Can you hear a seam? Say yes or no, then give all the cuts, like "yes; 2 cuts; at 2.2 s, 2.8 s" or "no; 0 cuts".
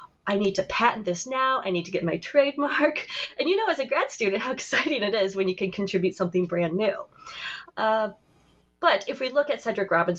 yes; 1 cut; at 7.7 s